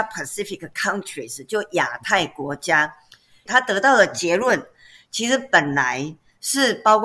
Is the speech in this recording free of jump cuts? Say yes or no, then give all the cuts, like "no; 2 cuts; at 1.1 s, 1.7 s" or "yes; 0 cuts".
no; 1 cut; at 3.5 s